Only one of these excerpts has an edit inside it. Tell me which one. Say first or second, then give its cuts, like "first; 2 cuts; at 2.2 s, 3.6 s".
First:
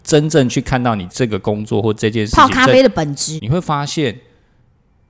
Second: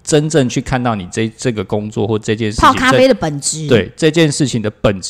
first; 2 cuts; at 1.1 s, 3.4 s